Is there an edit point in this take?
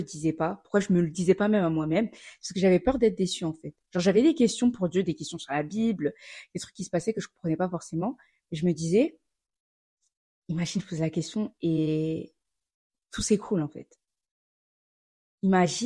no; 0 cuts

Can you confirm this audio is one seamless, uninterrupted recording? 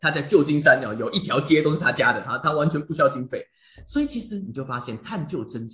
yes; 0 cuts

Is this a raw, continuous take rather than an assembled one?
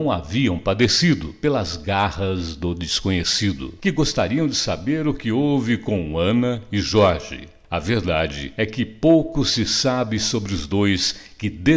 no; 1 cut; at 3.8 s

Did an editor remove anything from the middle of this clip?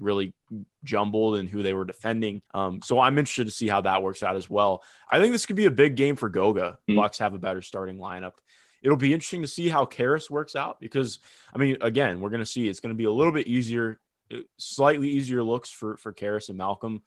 yes; 2 cuts; at 2.5 s, 6.9 s

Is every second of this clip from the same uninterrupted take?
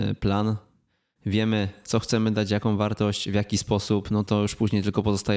yes; 0 cuts

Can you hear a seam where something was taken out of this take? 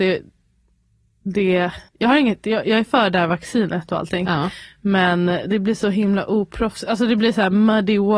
yes; 1 cut; at 1.9 s

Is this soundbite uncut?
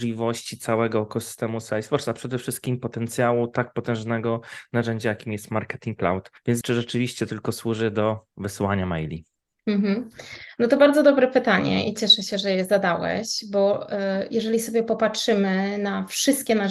no; 1 cut; at 6.6 s

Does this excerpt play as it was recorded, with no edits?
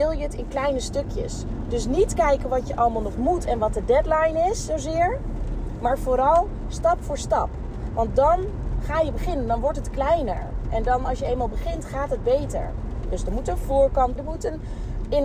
no; 2 cuts; at 13.0 s, 14.2 s

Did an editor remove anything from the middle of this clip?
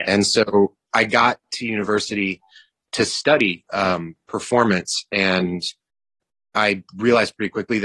no; 0 cuts

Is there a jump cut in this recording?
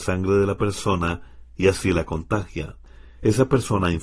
no; 0 cuts

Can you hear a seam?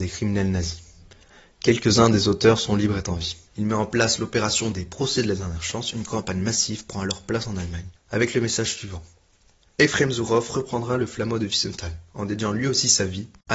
yes; 3 cuts; at 3.5 s, 8.0 s, 9.7 s

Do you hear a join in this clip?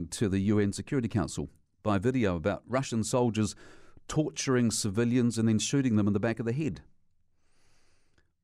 no; 0 cuts

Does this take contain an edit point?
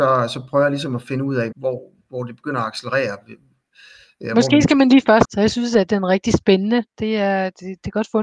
yes; 2 cuts; at 1.5 s, 5.2 s

